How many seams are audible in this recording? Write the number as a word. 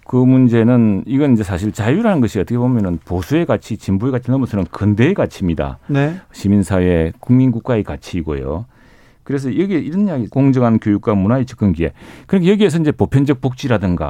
one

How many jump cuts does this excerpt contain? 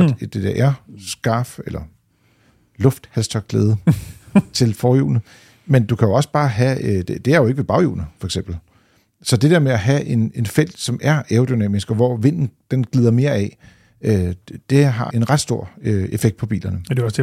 one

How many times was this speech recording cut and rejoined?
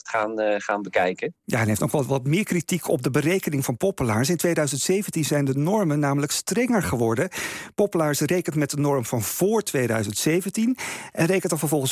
zero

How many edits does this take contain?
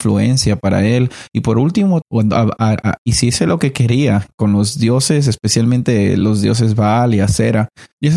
one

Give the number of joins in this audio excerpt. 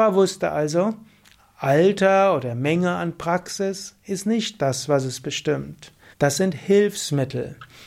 one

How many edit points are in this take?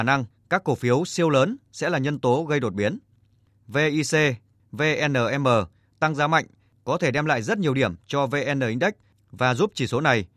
one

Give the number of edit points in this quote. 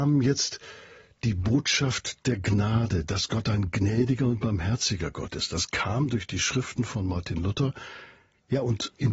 zero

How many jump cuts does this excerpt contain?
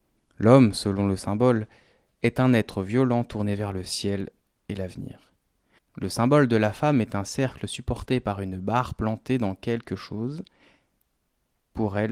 one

